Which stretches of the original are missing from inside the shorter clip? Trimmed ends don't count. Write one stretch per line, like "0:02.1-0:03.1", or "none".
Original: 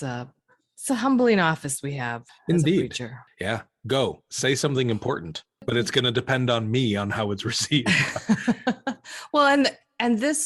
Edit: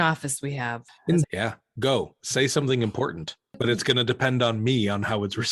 0:02.6-0:03.3